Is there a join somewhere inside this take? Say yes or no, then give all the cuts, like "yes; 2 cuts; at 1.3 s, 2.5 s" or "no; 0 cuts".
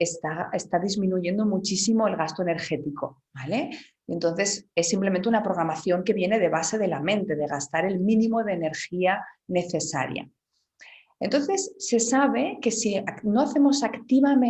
no; 0 cuts